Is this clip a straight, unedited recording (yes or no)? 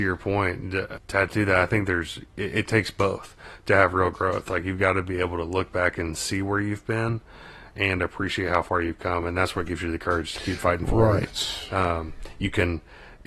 yes